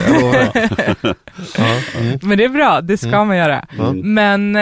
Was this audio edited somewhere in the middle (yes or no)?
no